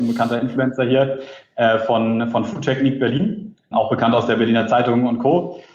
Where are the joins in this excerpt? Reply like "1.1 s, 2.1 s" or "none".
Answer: 3.7 s